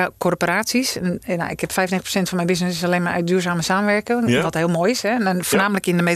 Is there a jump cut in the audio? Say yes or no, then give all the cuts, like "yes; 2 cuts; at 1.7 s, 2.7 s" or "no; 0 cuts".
no; 0 cuts